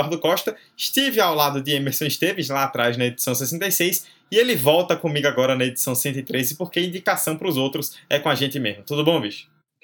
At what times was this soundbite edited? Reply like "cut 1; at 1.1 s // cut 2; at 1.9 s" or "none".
none